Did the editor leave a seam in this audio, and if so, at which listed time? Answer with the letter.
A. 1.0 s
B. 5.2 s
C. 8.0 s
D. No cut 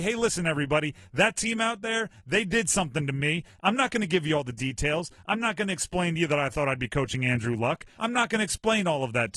C